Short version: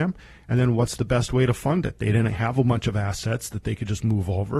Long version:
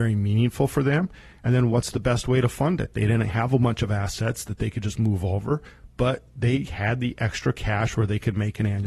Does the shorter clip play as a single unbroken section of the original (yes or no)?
yes